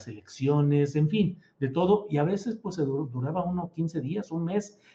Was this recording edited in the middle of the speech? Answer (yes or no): no